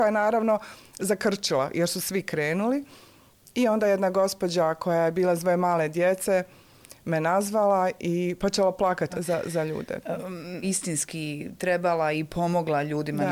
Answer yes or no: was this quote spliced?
yes